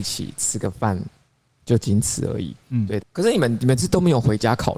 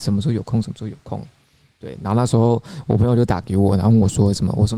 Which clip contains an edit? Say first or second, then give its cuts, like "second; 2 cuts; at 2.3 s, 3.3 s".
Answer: first; 1 cut; at 3.0 s